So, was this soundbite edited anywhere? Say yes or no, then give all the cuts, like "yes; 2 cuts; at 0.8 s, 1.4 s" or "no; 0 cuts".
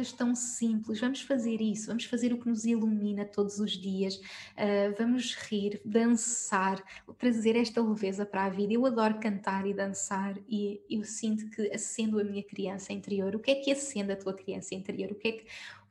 no; 0 cuts